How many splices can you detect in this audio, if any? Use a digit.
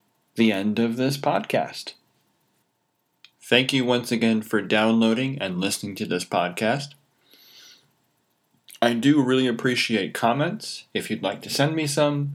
0